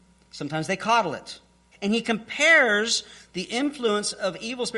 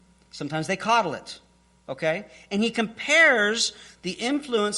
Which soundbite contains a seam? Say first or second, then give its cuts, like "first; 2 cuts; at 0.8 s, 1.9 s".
first; 1 cut; at 1.7 s